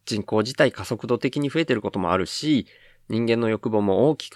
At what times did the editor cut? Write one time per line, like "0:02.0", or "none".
none